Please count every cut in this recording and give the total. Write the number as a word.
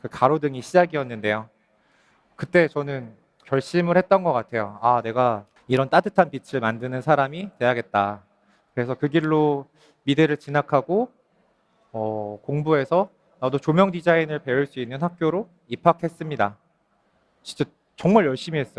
zero